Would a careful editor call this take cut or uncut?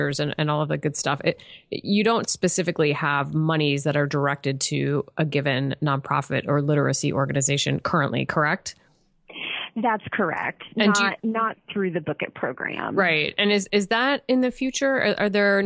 uncut